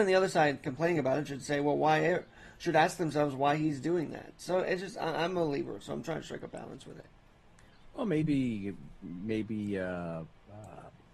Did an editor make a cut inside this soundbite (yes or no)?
no